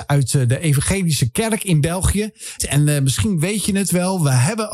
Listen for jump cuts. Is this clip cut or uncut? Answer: cut